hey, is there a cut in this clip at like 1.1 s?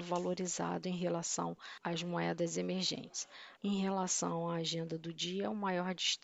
no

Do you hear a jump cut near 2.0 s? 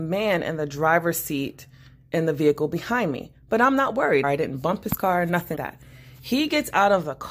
no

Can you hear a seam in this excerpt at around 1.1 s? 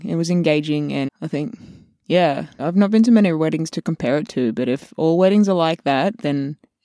yes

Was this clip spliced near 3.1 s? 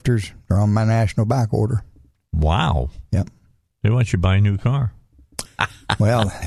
no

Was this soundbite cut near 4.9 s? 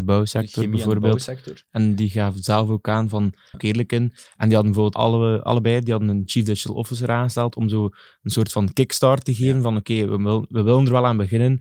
yes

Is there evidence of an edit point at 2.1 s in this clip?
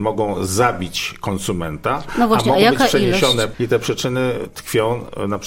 no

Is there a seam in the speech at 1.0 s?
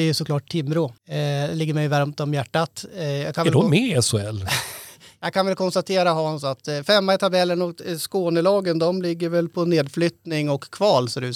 yes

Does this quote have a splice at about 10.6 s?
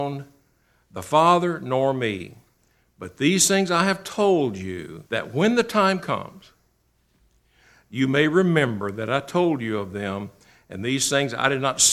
no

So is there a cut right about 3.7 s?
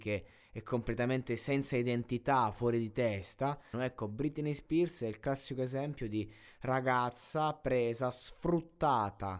yes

